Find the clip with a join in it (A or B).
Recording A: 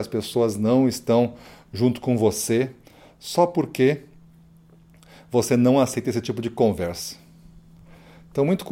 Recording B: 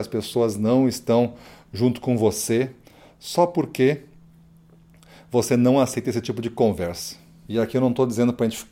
B